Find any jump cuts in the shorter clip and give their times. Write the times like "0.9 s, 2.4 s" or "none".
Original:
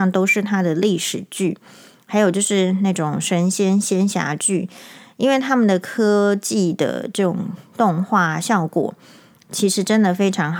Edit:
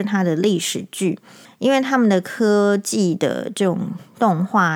1.5 s